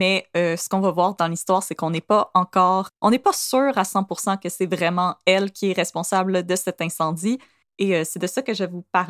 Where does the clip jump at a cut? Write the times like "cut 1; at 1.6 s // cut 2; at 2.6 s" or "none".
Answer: cut 1; at 2.9 s